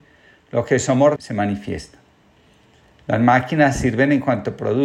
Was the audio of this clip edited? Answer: yes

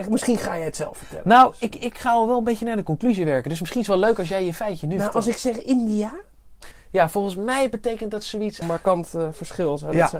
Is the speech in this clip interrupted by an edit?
yes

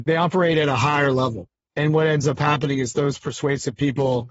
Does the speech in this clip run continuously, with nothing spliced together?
yes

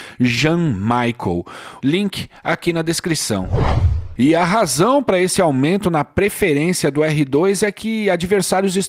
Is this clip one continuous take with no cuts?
no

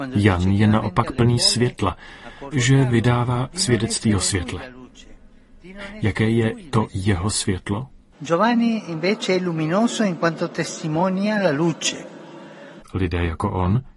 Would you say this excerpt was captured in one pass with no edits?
no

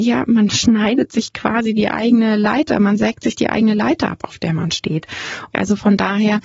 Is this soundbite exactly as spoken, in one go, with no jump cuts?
no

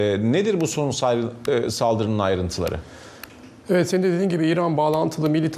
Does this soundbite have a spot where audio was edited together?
no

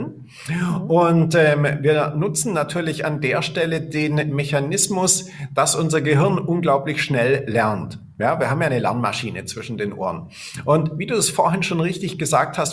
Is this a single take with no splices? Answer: yes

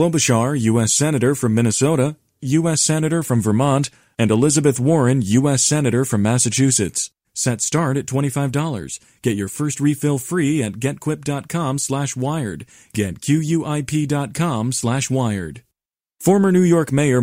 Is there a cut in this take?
yes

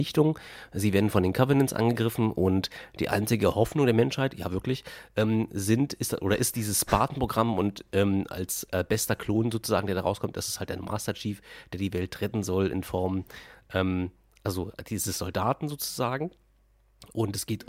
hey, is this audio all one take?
yes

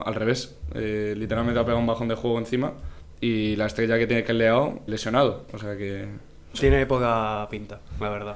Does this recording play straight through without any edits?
no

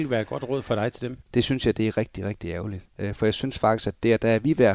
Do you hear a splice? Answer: yes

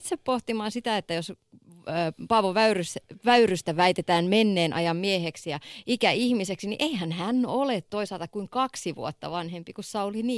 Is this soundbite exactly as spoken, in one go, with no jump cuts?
yes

